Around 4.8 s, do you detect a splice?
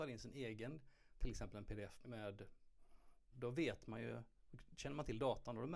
no; 2 cuts; at 2.0 s, 3.3 s

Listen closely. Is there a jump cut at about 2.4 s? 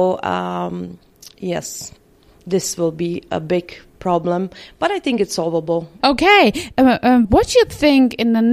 no; 2 cuts; at 6.0 s, 7.2 s

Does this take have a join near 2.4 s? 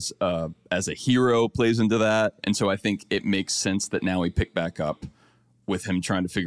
yes; 1 cut; at 2.4 s

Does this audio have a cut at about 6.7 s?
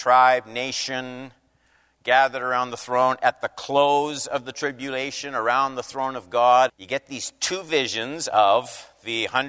yes; 1 cut; at 6.7 s

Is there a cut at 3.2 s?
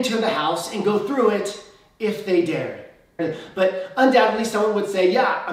yes; 1 cut; at 3.2 s

